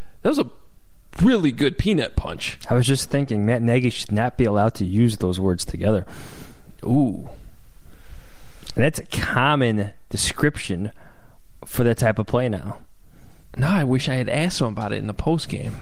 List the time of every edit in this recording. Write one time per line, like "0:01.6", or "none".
none